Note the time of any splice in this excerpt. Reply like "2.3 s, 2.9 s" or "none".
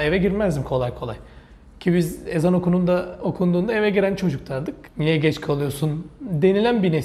4.9 s